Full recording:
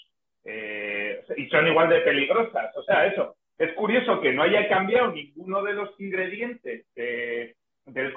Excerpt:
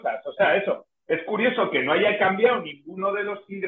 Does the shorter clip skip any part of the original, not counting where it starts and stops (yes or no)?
no